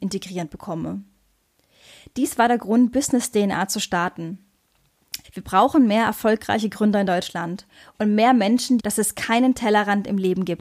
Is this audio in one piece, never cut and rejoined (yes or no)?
no